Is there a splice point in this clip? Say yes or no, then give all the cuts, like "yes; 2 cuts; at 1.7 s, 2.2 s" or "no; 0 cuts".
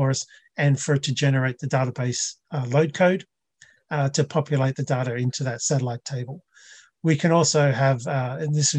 no; 0 cuts